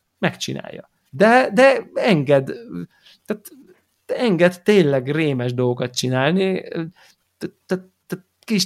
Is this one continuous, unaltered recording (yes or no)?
no